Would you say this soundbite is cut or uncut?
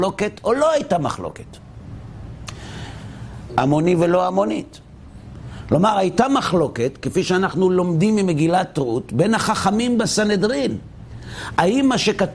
cut